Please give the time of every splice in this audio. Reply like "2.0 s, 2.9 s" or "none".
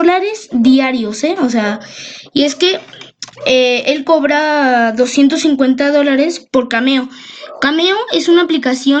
none

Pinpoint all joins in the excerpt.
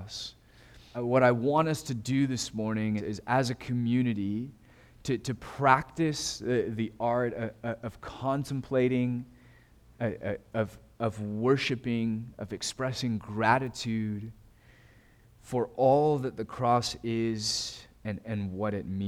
0.9 s, 3.0 s

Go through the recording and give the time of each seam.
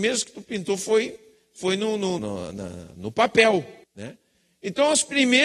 2.2 s, 3.8 s

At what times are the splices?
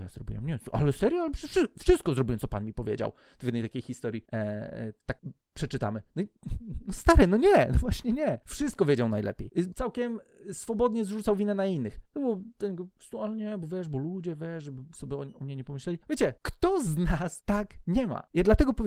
12.1 s

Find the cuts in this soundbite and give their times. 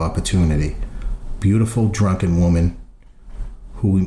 none

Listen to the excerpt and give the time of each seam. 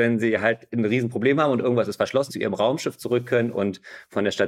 2.3 s

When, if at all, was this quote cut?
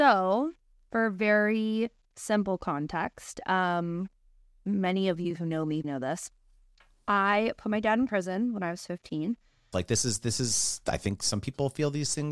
5.8 s, 9.7 s

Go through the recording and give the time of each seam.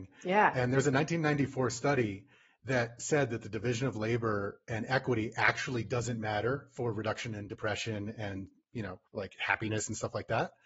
9.1 s

